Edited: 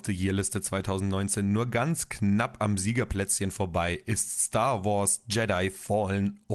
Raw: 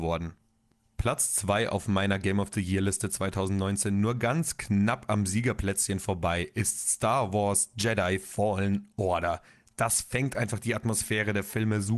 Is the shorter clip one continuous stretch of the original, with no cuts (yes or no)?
yes